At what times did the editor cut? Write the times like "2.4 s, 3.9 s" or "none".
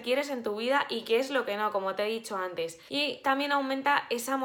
2.9 s